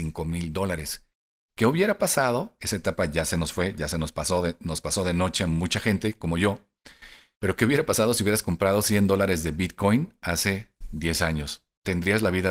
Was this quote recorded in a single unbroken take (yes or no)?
no